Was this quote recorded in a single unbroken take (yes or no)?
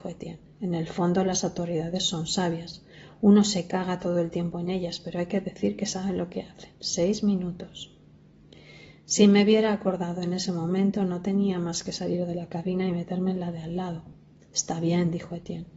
yes